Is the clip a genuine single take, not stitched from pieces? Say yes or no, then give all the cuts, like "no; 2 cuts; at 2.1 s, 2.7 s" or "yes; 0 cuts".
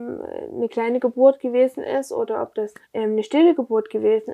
no; 1 cut; at 2.8 s